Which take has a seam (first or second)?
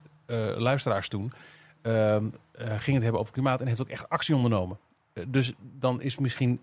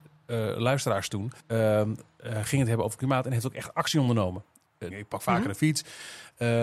second